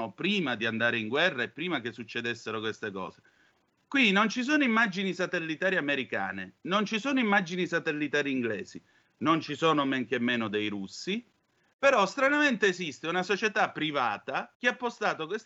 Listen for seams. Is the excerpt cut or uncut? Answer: cut